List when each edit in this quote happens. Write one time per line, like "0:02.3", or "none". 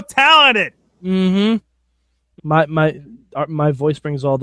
0:02.4